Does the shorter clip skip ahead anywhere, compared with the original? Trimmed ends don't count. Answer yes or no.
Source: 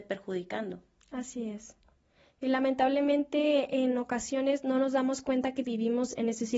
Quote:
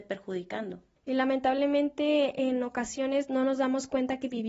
yes